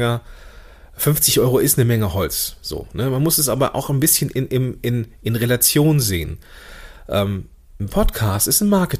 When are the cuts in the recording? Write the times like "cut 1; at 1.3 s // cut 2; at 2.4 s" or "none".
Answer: none